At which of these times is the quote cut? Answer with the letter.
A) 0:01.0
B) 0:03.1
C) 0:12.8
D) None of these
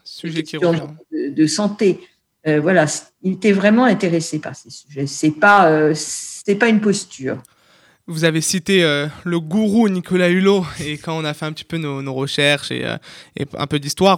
A